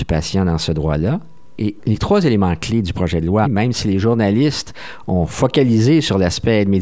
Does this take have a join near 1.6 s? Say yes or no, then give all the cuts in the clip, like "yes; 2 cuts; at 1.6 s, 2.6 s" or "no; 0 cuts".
yes; 2 cuts; at 1.6 s, 3.4 s